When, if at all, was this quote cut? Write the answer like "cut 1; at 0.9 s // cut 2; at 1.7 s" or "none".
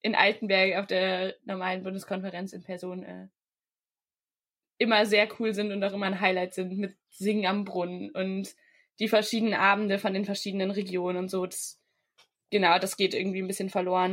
none

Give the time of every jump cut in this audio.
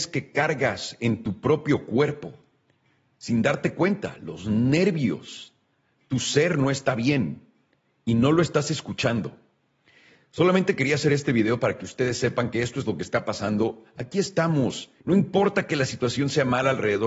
cut 1; at 15.0 s

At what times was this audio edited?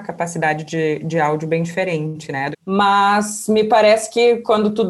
cut 1; at 2.5 s

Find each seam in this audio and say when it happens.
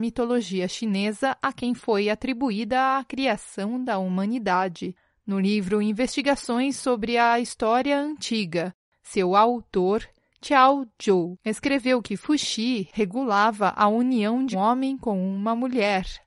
cut 1; at 14.5 s

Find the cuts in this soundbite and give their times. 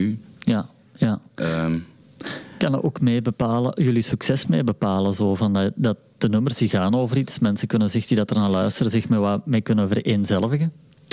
none

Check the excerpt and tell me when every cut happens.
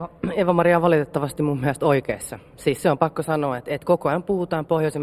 none

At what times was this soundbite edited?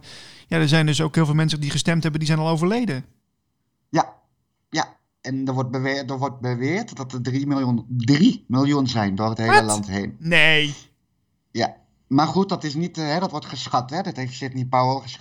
none

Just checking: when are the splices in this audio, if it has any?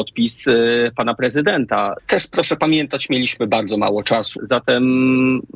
cut 1; at 2.0 s // cut 2; at 4.4 s

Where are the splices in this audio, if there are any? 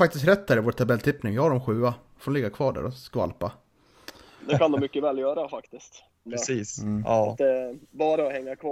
cut 1; at 2.1 s // cut 2; at 6.3 s

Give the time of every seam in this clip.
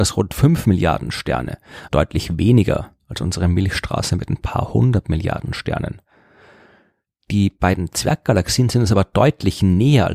cut 1; at 1.9 s

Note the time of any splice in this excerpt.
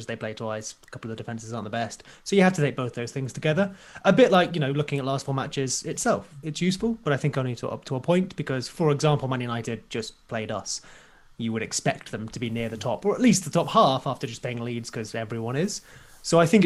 none

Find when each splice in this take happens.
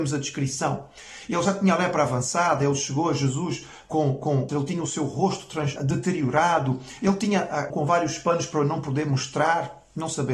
cut 1; at 4.5 s // cut 2; at 5.8 s // cut 3; at 7.7 s

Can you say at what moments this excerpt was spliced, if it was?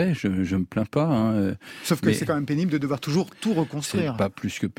none

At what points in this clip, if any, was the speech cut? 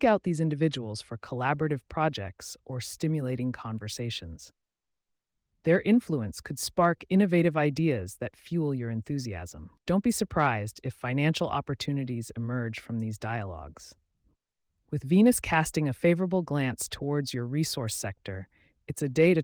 none

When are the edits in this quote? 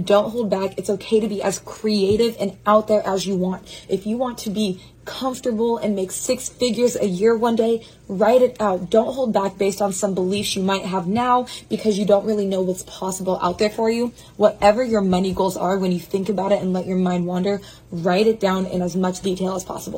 cut 1; at 3.9 s

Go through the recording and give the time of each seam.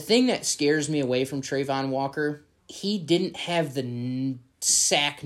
cut 1; at 2.6 s

